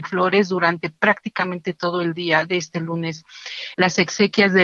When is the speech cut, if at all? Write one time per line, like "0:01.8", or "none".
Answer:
0:03.7